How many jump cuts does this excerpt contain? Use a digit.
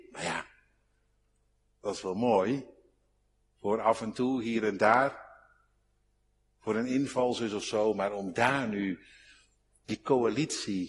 1